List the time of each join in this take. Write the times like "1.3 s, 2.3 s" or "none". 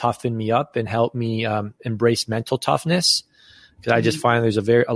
none